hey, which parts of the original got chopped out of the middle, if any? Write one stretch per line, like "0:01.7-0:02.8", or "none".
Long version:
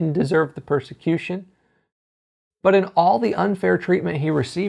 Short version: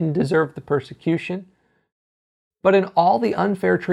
none

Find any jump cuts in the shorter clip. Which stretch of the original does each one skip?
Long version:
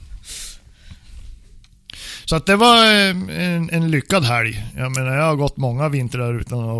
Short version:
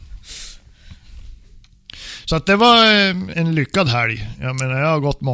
0:03.3-0:03.7

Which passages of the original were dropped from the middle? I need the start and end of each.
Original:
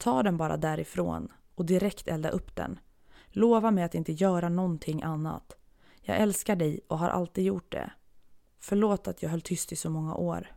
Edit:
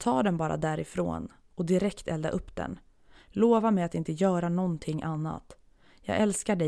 none

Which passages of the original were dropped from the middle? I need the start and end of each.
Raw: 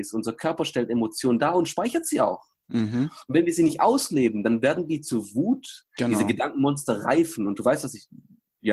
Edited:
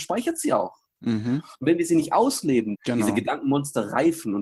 0:04.4-0:05.9

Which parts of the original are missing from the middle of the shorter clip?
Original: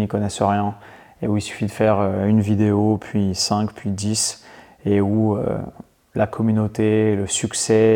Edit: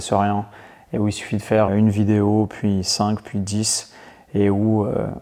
0:02.0-0:02.2

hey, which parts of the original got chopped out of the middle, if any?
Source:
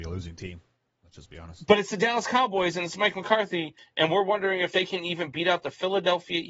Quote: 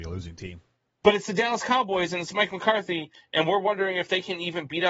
0:01.0-0:01.7

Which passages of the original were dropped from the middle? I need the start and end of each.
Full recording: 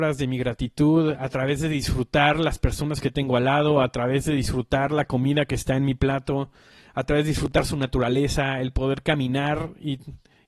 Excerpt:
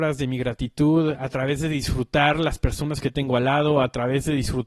none

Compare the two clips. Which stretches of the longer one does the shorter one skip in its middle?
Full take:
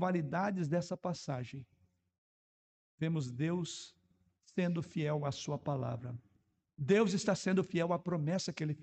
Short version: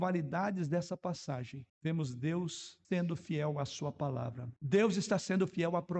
0:01.7-0:02.9
0:04.0-0:04.5
0:06.2-0:06.7

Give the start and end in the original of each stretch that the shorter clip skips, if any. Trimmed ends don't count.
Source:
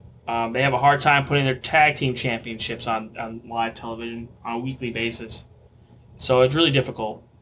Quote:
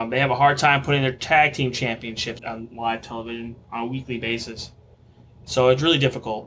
0:02.8-0:03.1

